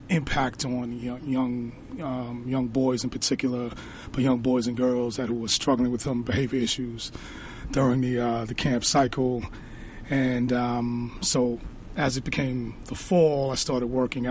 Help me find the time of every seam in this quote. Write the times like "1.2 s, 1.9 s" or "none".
none